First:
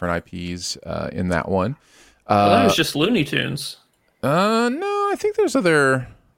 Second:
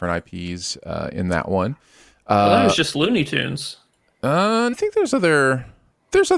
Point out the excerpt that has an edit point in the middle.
second; 1 cut; at 4.7 s

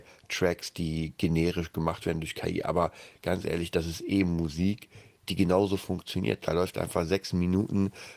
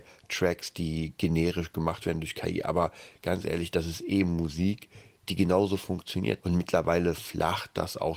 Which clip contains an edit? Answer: second; 1 cut; at 6.4 s

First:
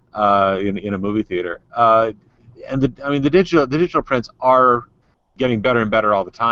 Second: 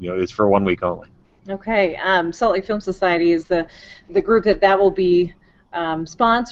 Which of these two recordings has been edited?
second; 1 cut; at 4.1 s

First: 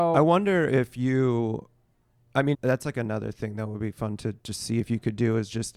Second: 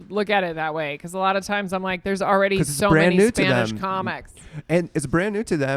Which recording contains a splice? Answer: first; 2 cuts; at 2.5 s, 4.4 s

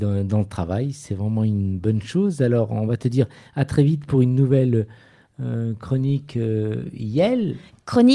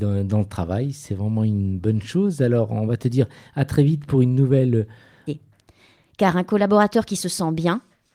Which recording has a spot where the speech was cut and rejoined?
second; 1 cut; at 5.3 s

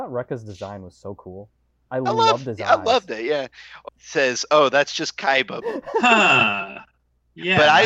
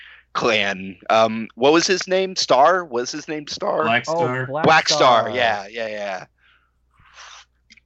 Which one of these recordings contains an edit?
first; 2 cuts; at 3.9 s, 5.6 s

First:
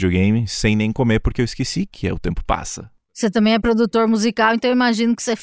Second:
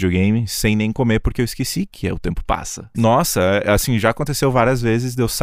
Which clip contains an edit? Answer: second; 1 cut; at 2.9 s

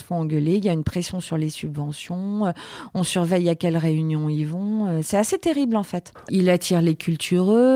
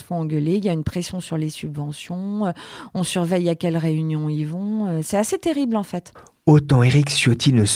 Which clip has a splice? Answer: first; 1 cut; at 6.3 s

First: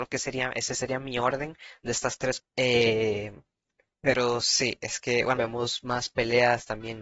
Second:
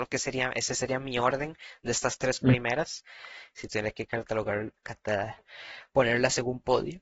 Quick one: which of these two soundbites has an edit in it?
first; 2 cuts; at 2.4 s, 5.4 s

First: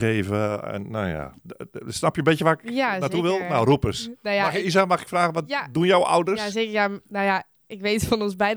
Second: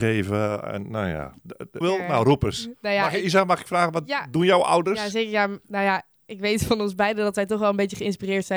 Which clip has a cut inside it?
second; 1 cut; at 1.8 s

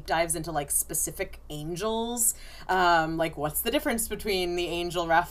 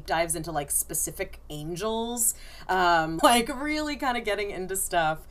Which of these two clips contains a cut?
second; 1 cut; at 3.2 s

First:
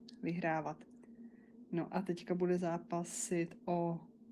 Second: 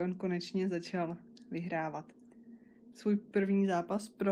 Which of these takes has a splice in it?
second; 1 cut; at 2.9 s

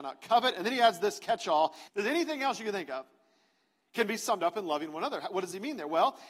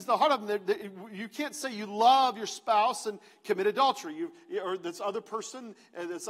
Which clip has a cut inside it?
first; 1 cut; at 1.9 s

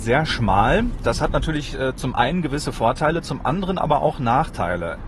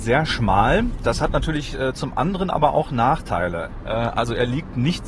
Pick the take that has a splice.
second; 1 cut; at 1.9 s

